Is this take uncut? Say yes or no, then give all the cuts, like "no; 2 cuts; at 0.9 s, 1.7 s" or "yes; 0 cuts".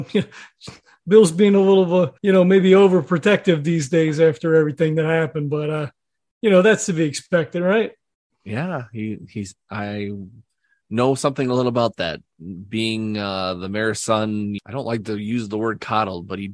no; 2 cuts; at 2.2 s, 14.6 s